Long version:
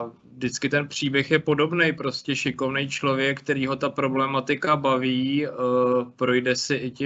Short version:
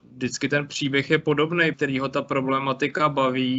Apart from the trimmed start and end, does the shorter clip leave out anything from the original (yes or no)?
yes